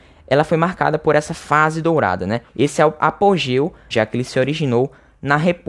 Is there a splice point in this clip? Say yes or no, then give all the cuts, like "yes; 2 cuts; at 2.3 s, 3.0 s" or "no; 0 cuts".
yes; 2 cuts; at 2.5 s, 3.9 s